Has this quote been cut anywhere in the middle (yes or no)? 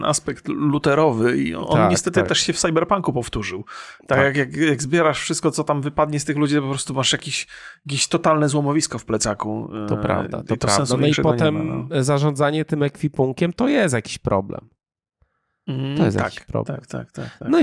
no